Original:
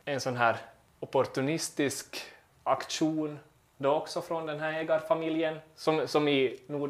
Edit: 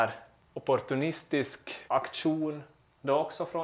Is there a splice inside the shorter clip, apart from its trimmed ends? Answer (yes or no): yes